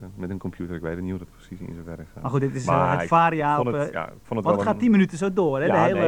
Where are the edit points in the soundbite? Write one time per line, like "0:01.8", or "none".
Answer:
none